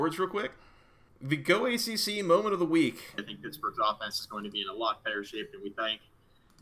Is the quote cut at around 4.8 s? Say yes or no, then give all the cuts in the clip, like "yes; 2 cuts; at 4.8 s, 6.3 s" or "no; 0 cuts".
no; 2 cuts; at 1.1 s, 3.2 s